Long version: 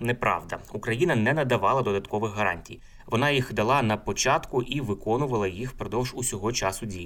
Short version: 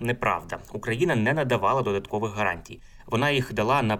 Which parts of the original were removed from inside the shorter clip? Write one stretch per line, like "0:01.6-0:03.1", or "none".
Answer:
none